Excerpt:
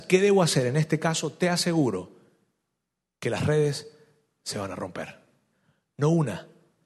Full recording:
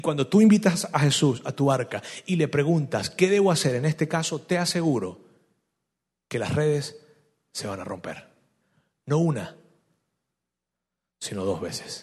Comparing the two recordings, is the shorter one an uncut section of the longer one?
yes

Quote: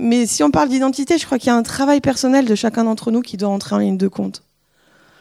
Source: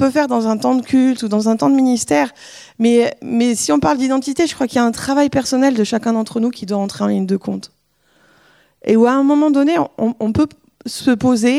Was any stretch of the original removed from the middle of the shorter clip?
no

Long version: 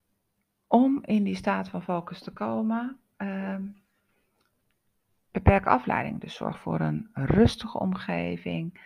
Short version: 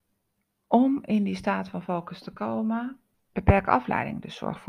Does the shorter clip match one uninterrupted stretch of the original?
no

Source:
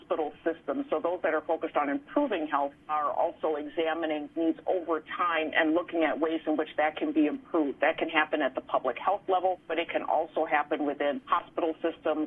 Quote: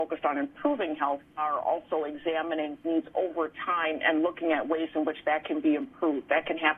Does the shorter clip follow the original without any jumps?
yes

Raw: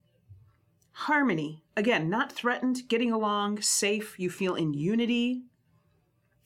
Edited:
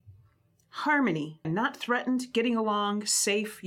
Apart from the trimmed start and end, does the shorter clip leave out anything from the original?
yes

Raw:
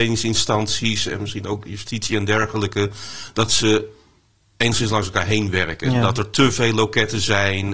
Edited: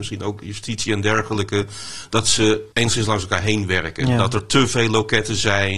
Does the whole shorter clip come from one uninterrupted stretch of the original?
no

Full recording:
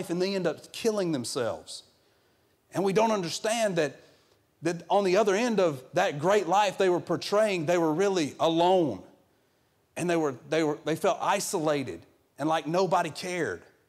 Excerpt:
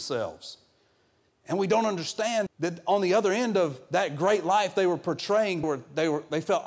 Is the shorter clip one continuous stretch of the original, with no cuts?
no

